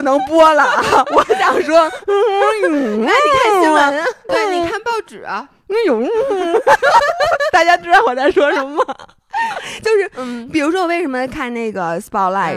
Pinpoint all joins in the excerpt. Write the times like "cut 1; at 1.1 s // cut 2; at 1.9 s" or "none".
cut 1; at 4.3 s